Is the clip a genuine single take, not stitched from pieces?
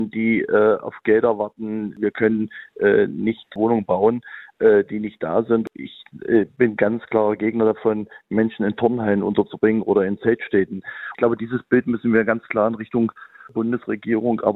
yes; 0 cuts

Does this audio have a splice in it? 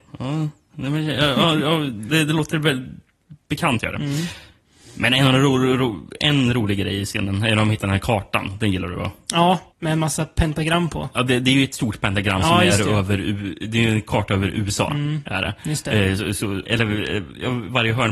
yes; 2 cuts; at 9.7 s, 16.6 s

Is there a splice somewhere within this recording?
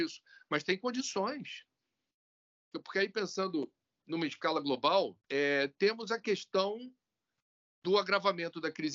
yes; 2 cuts; at 2.7 s, 5.2 s

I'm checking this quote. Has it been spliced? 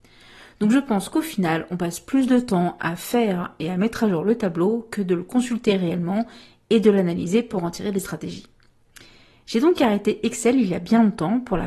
no; 0 cuts

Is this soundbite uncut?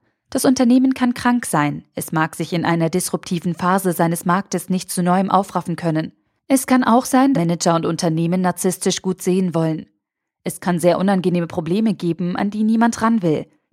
no; 1 cut; at 7.3 s

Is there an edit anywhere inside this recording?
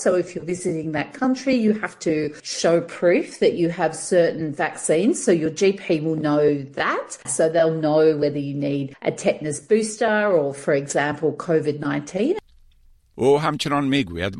yes; 1 cut; at 7.2 s

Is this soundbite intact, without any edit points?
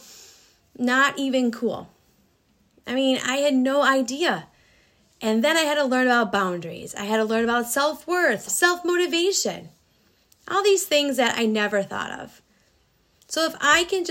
no; 1 cut; at 8.5 s

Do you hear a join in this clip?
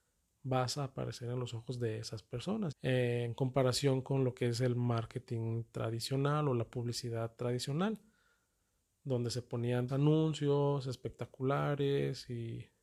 yes; 2 cuts; at 2.7 s, 9.9 s

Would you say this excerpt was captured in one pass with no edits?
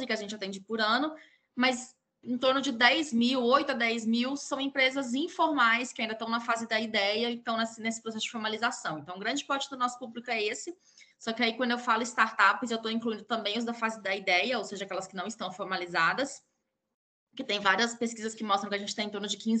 no; 1 cut; at 11.1 s

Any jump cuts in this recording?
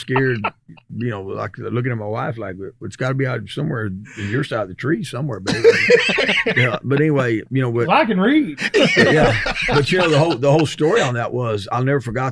no; 0 cuts

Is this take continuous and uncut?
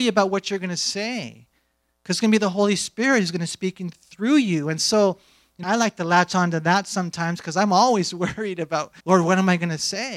no; 2 cuts; at 5.6 s, 9.0 s

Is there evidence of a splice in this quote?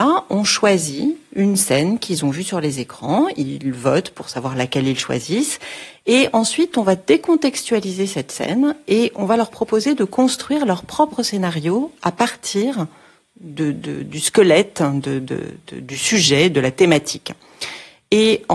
no; 0 cuts

